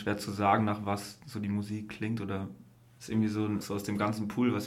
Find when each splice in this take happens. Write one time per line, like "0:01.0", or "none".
0:03.6